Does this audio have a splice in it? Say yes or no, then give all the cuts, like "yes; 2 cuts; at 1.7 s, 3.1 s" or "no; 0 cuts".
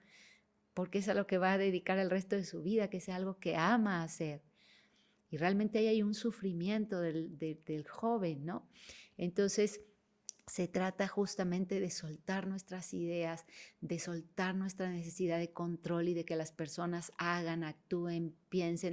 no; 0 cuts